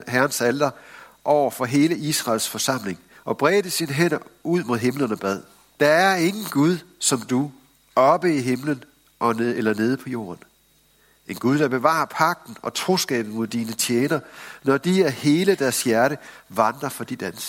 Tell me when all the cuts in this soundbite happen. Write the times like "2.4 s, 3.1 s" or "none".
5.8 s